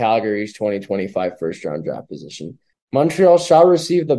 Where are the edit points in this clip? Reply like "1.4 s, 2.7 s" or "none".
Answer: 2.7 s